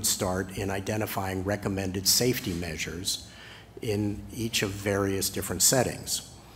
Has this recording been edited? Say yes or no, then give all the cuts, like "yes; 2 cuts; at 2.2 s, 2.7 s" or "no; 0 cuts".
no; 0 cuts